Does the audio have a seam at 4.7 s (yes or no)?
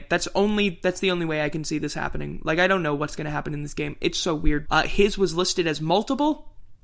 yes